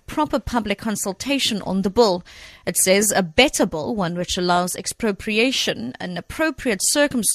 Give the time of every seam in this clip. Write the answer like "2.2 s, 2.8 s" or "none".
none